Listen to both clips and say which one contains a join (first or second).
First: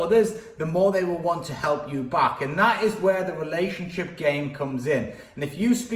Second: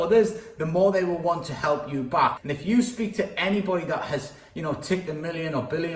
second